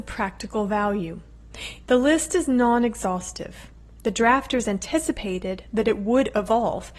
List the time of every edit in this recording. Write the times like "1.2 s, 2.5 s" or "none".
1.8 s